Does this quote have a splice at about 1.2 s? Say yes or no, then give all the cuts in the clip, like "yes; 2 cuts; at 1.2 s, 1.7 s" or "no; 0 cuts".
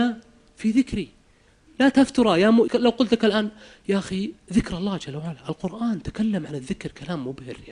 no; 1 cut; at 2.7 s